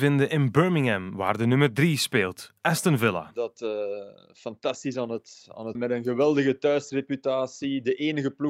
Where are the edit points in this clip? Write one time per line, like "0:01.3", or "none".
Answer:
0:05.7